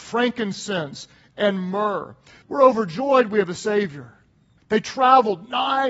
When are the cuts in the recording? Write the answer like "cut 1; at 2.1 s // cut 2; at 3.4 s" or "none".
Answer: cut 1; at 2.4 s // cut 2; at 4.6 s